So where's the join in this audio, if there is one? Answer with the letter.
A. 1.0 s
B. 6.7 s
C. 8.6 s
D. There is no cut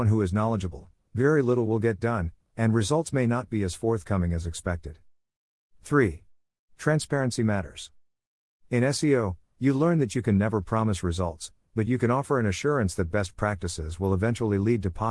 D